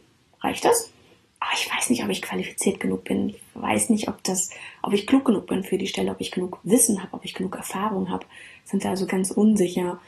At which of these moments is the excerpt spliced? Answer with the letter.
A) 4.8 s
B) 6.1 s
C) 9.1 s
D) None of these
C